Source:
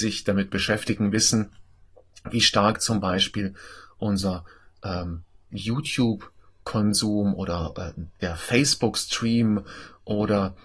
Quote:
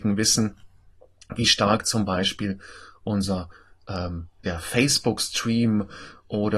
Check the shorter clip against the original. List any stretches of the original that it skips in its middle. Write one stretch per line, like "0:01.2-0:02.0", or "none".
0:05.3-0:08.2